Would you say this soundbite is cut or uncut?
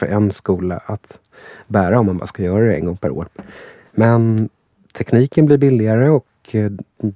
uncut